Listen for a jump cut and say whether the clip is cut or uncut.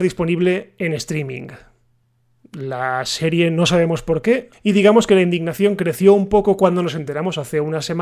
cut